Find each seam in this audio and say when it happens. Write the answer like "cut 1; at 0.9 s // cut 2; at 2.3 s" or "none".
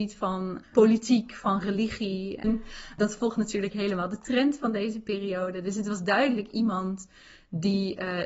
cut 1; at 2.4 s